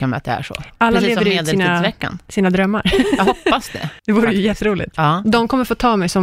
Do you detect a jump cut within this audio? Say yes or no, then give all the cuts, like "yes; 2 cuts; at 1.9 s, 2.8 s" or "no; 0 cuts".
yes; 2 cuts; at 4.0 s, 5.2 s